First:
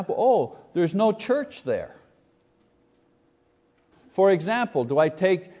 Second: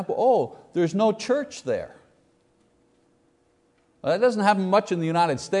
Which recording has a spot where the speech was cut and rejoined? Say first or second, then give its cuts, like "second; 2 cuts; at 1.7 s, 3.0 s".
first; 1 cut; at 3.9 s